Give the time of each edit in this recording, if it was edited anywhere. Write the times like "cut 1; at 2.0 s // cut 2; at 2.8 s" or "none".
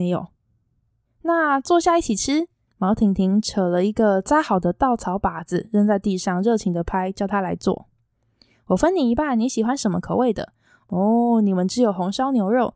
none